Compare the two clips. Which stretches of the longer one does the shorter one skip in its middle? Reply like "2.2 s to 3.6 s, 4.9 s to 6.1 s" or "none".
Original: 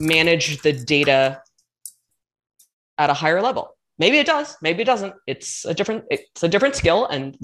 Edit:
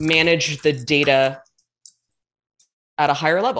none

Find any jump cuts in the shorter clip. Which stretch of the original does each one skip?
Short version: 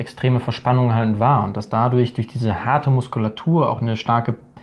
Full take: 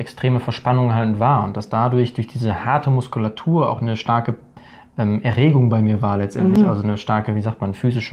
none

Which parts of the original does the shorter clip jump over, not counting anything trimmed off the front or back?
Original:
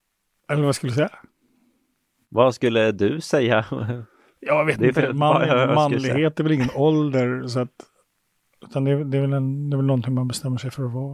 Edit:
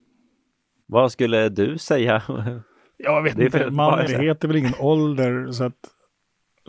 5.5 s to 6.0 s

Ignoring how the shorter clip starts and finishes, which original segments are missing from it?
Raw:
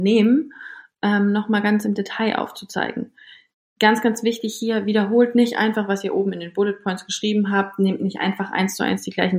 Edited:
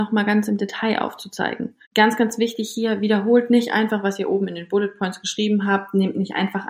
3.2 s to 3.7 s

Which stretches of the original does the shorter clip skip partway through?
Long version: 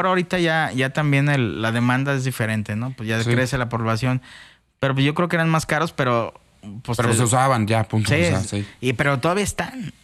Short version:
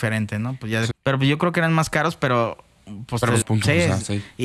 3.3 s to 4.7 s, 7.2 s to 7.8 s

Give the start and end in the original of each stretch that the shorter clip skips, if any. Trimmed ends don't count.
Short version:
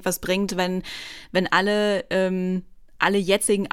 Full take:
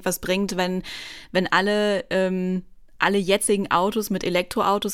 none

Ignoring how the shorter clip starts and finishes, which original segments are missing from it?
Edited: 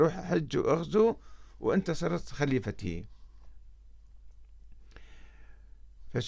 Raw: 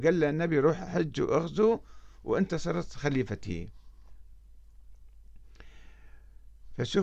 none

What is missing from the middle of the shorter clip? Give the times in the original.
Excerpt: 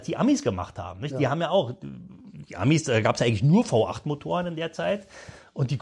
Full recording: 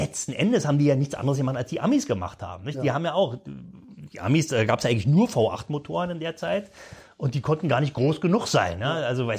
none

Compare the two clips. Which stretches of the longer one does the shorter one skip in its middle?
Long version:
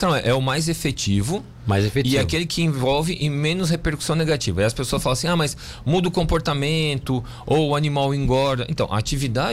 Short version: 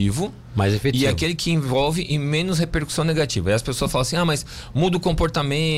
none

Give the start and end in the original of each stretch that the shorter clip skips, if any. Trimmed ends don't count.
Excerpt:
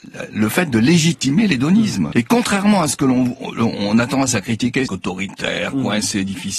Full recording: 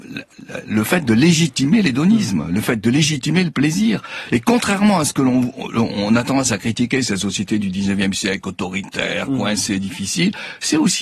2.5 s to 4.3 s, 7.0 s to 8.4 s

